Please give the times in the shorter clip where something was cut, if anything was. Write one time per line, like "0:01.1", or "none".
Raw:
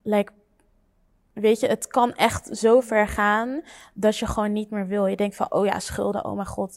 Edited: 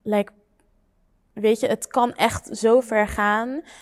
none